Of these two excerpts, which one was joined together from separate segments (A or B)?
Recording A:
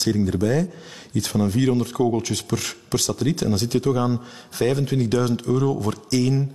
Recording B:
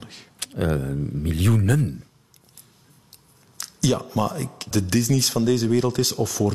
B